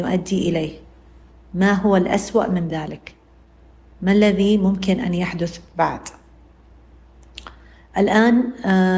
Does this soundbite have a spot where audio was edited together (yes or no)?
no